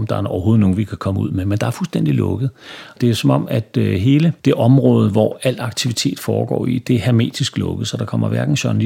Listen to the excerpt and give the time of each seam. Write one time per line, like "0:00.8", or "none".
none